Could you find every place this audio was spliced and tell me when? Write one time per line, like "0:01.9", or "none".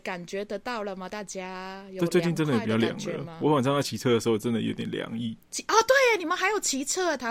none